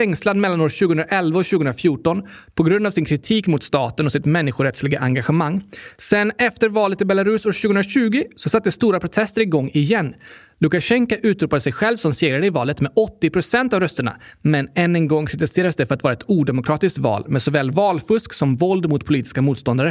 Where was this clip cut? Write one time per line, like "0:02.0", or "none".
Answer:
none